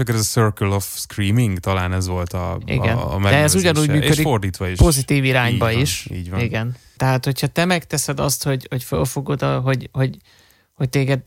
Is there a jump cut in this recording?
yes; 1 cut; at 7.0 s

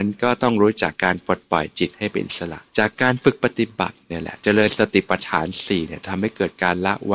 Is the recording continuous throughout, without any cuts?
no; 2 cuts; at 0.9 s, 2.7 s

